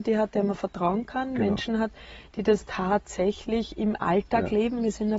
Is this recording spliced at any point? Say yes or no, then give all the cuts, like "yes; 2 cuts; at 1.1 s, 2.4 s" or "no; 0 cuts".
no; 0 cuts